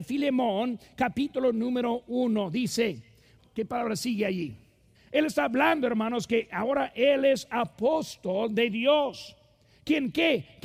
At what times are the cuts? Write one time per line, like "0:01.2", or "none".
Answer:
0:03.4
0:04.9